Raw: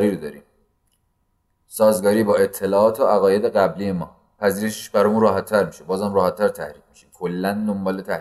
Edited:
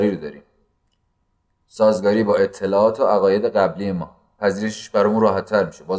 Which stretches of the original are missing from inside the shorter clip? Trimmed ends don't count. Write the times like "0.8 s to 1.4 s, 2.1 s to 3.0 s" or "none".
none